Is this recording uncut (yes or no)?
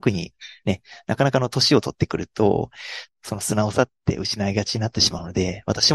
no